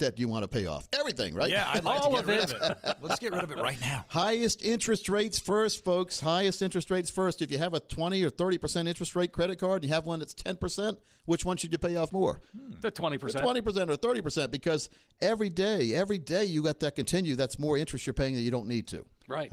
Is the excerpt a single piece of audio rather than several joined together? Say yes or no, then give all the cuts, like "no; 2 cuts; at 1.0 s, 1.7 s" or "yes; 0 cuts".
yes; 0 cuts